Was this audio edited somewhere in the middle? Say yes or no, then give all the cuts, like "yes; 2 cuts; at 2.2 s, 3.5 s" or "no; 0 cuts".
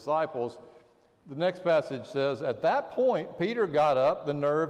no; 0 cuts